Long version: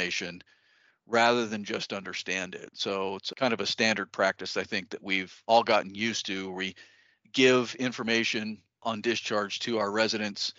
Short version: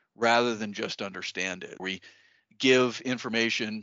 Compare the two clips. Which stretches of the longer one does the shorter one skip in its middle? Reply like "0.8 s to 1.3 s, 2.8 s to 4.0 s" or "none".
2.7 s to 6.5 s